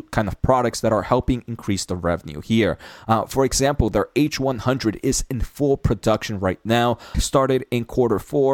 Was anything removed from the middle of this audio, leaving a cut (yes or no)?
yes